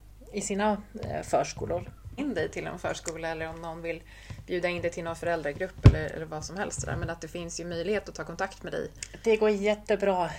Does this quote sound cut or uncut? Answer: cut